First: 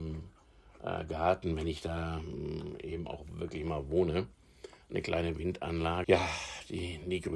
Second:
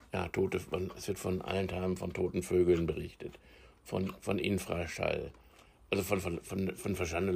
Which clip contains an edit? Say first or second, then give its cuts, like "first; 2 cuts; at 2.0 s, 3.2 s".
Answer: first; 1 cut; at 6.0 s